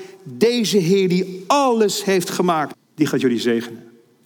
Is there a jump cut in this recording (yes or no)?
yes